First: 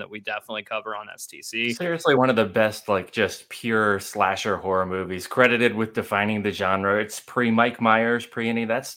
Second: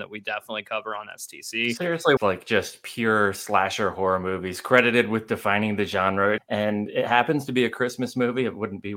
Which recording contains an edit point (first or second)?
second